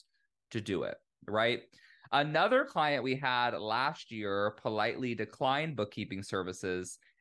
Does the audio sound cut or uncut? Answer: uncut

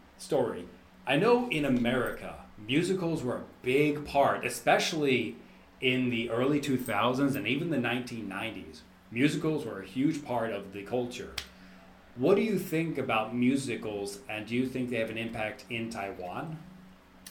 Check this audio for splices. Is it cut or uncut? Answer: uncut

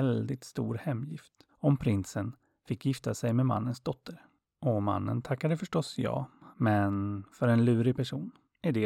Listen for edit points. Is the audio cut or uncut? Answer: cut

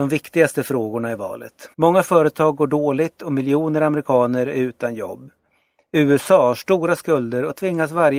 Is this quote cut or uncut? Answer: cut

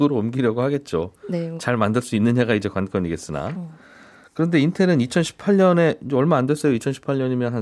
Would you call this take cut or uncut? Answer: uncut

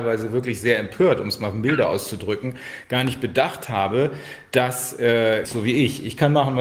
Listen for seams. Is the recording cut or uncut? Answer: cut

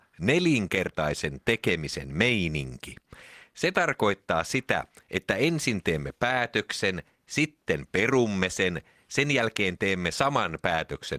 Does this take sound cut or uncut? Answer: uncut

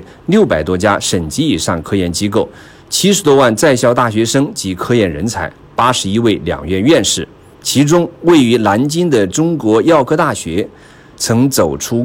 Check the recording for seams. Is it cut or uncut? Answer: uncut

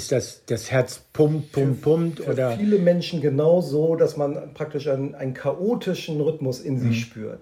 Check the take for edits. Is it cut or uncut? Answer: uncut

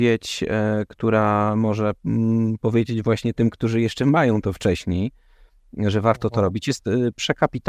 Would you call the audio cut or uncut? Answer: uncut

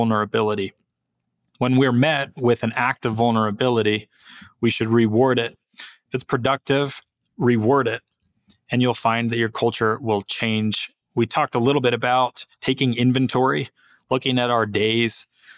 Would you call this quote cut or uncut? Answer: uncut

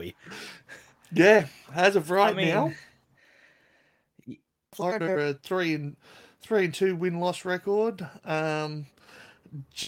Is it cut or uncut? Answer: uncut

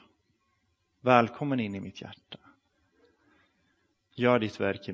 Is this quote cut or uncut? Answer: uncut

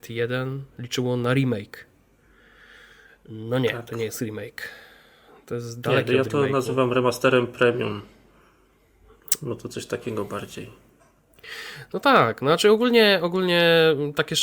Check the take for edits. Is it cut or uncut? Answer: uncut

